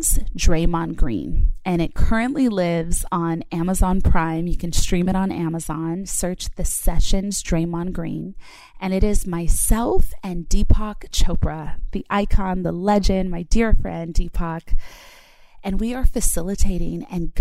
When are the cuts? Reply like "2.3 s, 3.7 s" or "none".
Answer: none